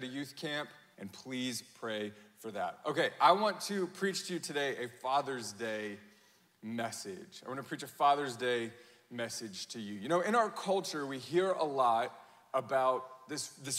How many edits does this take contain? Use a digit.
1